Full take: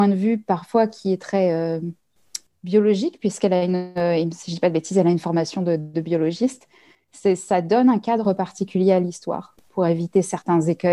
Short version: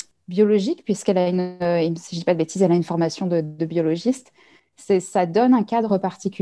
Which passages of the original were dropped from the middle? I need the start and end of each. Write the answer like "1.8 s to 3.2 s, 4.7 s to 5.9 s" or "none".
none